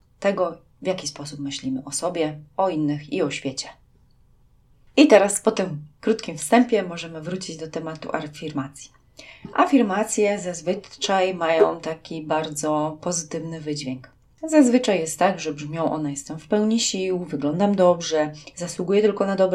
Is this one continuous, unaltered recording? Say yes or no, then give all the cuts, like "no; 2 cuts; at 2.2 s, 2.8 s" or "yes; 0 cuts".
yes; 0 cuts